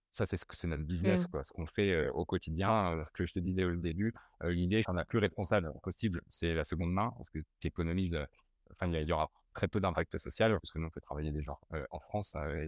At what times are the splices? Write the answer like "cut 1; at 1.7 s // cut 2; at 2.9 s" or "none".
cut 1; at 4.8 s // cut 2; at 10.6 s